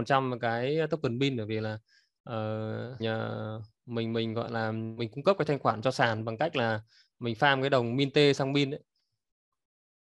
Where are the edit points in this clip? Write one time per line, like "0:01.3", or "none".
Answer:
0:03.0